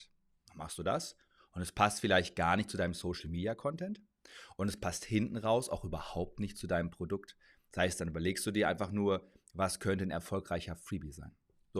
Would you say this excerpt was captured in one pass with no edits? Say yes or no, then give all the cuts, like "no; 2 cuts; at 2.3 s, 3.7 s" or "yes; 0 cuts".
yes; 0 cuts